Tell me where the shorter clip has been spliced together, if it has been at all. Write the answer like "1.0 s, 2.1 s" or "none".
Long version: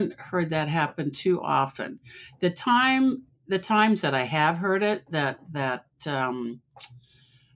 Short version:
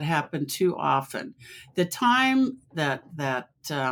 2.7 s